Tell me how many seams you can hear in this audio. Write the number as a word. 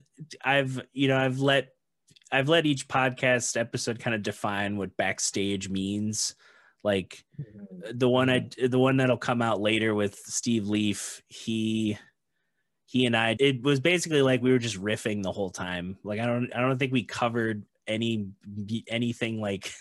one